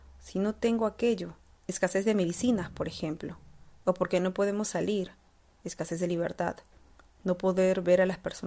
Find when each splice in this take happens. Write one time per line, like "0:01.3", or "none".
0:01.6